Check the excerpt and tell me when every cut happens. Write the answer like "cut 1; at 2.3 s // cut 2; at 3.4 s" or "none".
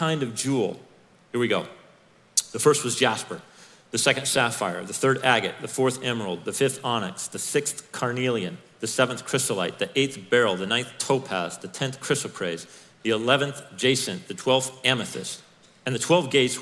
none